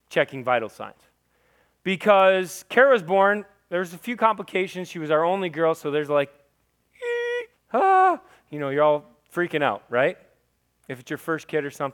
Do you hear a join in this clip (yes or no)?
yes